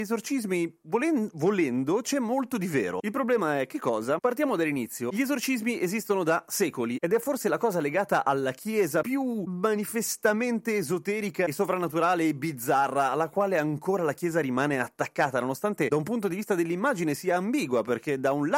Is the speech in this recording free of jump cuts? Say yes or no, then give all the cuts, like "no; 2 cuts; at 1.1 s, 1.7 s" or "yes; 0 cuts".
yes; 0 cuts